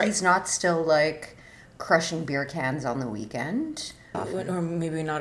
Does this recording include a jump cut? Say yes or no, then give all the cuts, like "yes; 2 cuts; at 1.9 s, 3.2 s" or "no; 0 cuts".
yes; 1 cut; at 4.1 s